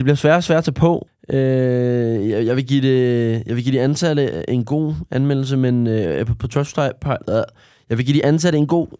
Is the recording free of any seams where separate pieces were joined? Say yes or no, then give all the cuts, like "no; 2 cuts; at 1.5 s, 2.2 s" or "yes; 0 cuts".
no; 1 cut; at 1.1 s